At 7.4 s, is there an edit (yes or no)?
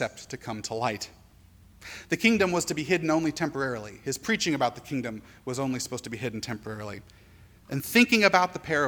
no